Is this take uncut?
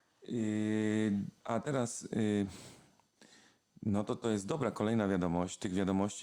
no; 1 cut; at 1.4 s

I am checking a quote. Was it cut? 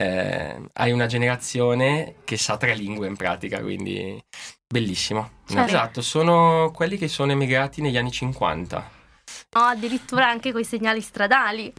yes; 3 cuts; at 4.6 s, 5.7 s, 9.6 s

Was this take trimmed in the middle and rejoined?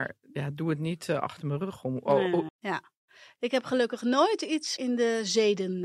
yes; 2 cuts; at 2.5 s, 4.8 s

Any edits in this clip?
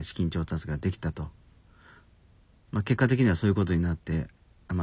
no; 0 cuts

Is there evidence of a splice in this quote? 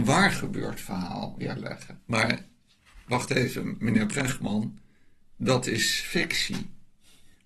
yes; 1 cut; at 2.0 s

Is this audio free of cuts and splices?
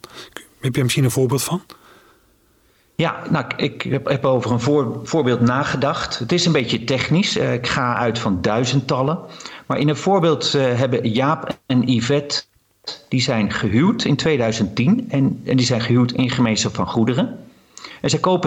yes; 0 cuts

